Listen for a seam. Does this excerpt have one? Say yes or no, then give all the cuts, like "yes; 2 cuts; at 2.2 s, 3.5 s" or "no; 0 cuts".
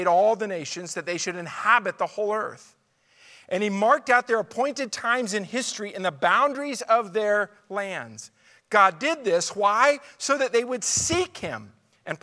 no; 0 cuts